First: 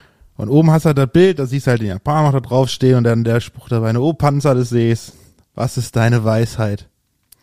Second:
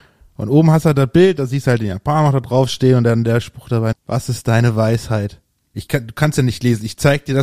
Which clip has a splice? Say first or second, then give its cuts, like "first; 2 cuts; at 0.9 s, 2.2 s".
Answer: second; 2 cuts; at 3.9 s, 5.7 s